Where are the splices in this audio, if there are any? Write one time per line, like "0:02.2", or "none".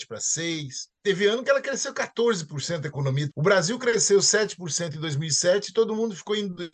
0:00.9
0:03.3